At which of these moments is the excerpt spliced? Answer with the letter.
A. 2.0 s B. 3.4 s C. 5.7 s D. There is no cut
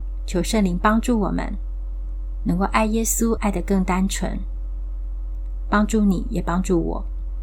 B